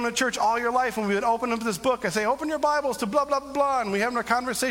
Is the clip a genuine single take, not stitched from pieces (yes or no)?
yes